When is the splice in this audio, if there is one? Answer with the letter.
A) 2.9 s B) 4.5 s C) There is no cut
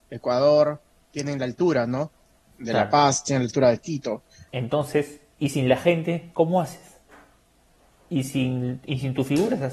B